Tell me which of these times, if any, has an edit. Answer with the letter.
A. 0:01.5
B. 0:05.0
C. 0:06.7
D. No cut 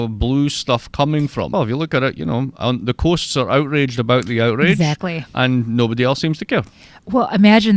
A